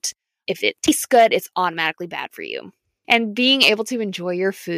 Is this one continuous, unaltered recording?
no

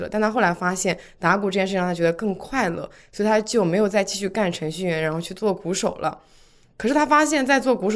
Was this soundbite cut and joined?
no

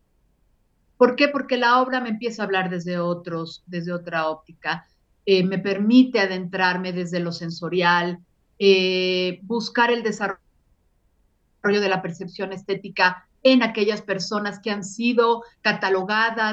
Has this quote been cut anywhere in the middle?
yes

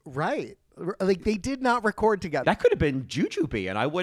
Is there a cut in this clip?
yes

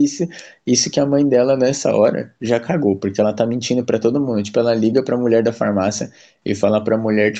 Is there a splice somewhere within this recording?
no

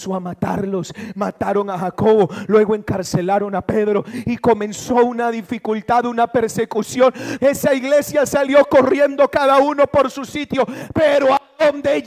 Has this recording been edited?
yes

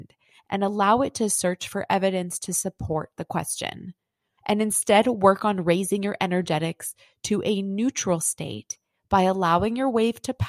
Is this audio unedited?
no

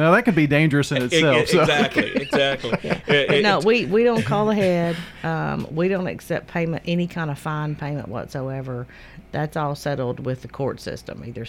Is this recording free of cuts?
yes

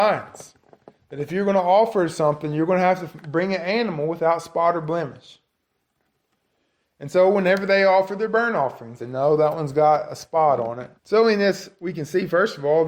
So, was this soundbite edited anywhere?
yes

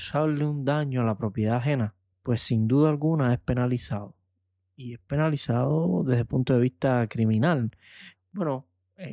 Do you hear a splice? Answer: yes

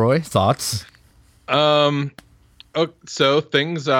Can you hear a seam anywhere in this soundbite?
no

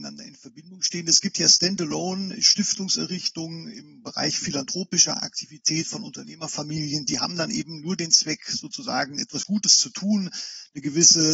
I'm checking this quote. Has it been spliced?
no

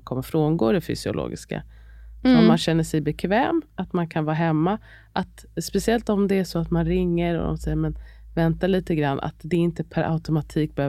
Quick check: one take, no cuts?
yes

